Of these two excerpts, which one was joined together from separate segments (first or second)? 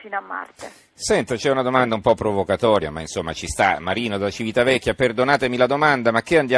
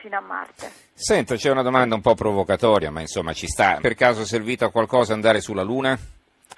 second